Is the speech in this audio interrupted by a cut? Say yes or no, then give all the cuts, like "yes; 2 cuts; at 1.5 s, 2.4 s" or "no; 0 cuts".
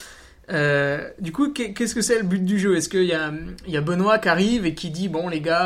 no; 0 cuts